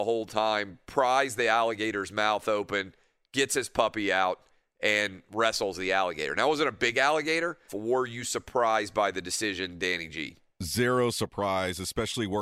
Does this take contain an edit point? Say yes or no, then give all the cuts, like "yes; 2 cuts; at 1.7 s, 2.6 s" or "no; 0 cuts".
yes; 1 cut; at 7.7 s